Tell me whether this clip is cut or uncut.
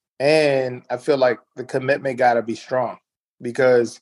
uncut